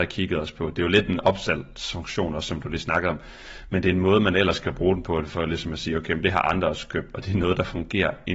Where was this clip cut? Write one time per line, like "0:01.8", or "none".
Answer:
none

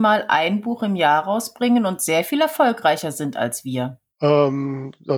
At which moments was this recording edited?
0:04.1

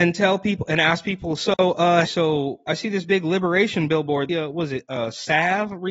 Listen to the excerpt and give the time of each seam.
0:02.1
0:04.3

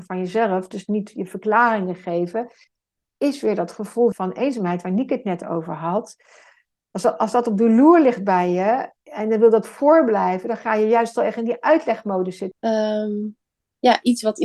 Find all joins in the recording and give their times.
0:04.1
0:12.5

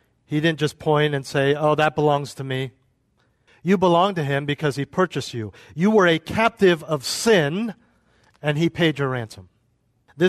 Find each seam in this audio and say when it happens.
0:03.5

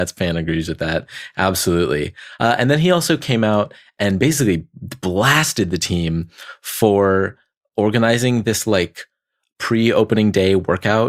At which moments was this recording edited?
none

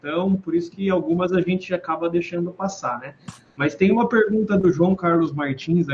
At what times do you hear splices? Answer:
none

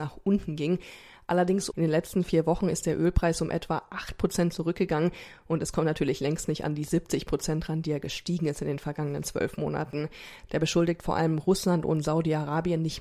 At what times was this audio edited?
0:01.7
0:10.5

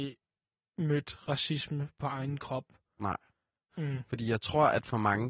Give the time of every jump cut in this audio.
0:03.7

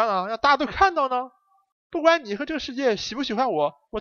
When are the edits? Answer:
0:01.7

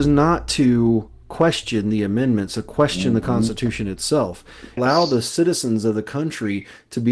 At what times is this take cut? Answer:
0:04.8

